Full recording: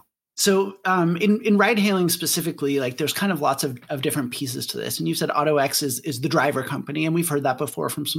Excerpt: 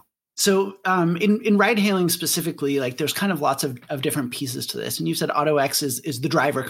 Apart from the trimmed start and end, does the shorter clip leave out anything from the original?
no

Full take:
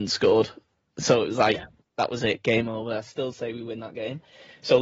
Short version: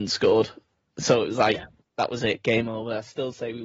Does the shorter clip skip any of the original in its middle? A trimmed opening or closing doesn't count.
no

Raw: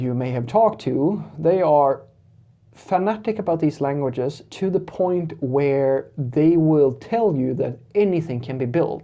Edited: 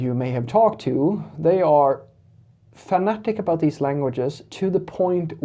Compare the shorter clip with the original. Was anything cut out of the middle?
no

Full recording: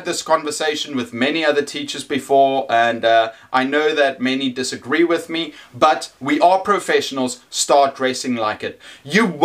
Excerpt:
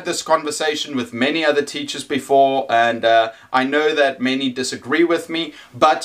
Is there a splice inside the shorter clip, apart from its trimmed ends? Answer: no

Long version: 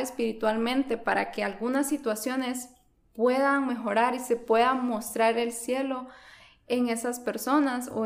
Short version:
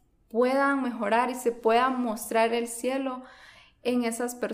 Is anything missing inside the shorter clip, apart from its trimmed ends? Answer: no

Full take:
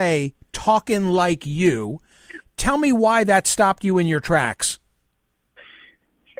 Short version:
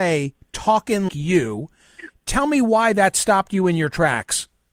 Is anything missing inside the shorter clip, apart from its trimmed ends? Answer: yes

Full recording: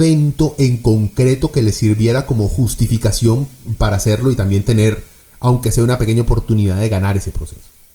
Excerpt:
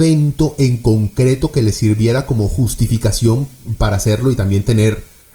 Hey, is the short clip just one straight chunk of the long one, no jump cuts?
yes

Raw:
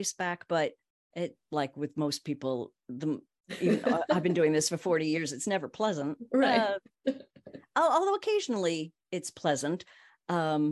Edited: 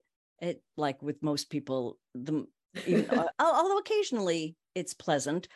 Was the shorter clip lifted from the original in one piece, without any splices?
no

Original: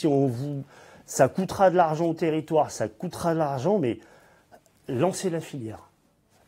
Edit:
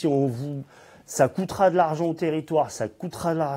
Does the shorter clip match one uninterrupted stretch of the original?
yes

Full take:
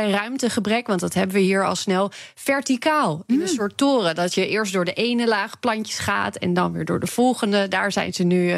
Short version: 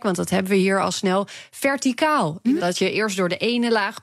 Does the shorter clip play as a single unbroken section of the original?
no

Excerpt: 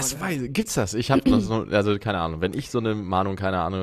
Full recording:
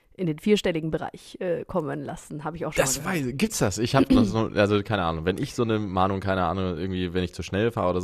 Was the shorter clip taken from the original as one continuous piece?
yes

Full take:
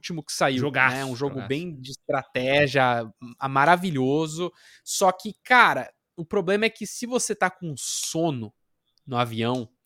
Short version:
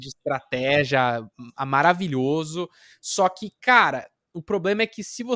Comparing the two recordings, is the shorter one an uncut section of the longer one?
yes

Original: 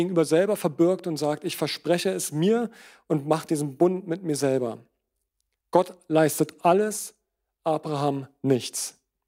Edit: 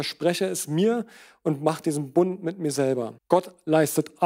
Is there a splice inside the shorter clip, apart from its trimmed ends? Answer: yes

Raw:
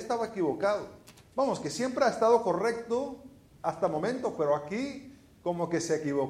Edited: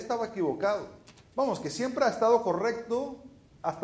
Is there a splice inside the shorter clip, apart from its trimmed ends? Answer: no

